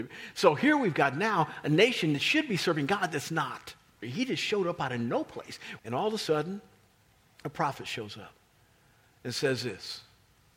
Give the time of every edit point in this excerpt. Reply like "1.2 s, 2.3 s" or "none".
4.0 s, 5.8 s